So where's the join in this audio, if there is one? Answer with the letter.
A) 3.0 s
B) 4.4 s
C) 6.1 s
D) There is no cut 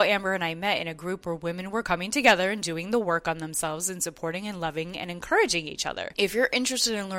C